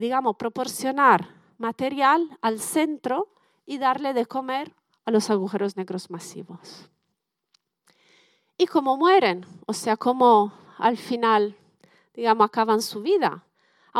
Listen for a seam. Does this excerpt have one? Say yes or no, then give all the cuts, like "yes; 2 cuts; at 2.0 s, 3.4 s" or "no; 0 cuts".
no; 0 cuts